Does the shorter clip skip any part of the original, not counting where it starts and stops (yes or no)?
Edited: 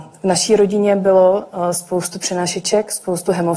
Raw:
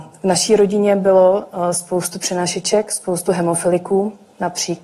no